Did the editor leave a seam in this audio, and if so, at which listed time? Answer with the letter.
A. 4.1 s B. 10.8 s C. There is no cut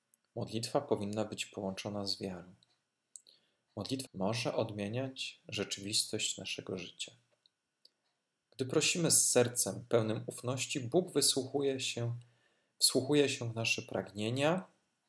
A